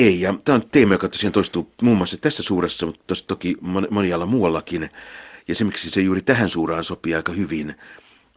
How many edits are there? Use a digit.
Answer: 1